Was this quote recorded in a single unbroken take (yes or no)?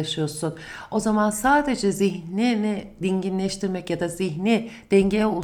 yes